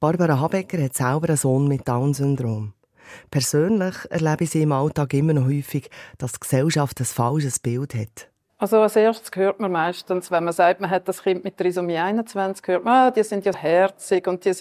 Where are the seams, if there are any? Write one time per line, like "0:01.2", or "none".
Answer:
0:13.5